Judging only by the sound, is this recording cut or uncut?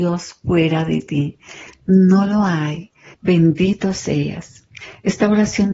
cut